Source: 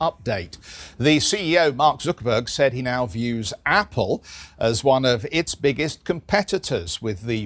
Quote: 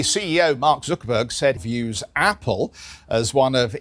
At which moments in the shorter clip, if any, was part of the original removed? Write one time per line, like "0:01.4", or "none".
0:01.6